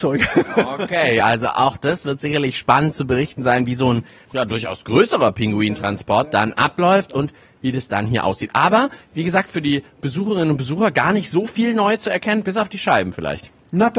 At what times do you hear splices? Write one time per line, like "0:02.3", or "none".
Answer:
none